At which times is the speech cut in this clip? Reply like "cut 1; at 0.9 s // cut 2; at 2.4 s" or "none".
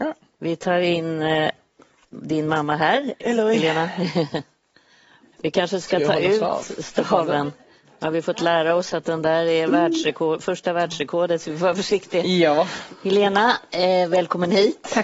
none